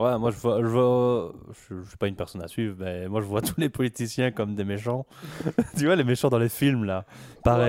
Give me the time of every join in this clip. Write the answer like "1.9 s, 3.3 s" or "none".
none